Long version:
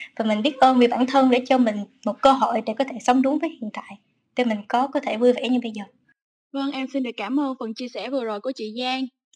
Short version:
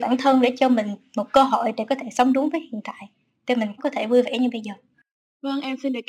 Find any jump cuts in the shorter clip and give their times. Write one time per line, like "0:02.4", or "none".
0:03.8